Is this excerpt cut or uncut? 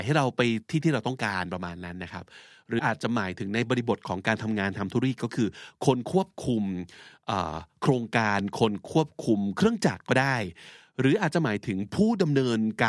cut